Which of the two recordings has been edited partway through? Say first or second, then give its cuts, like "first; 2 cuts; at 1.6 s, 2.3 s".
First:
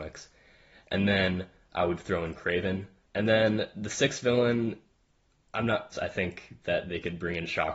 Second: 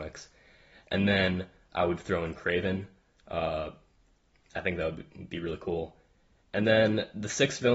first; 2 cuts; at 3.0 s, 5.9 s